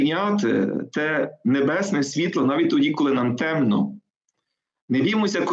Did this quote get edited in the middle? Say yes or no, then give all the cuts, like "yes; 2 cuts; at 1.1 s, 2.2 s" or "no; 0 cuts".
no; 0 cuts